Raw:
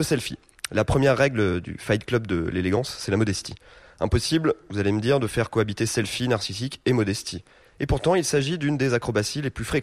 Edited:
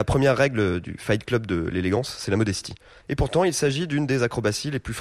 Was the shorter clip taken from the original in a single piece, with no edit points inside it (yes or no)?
no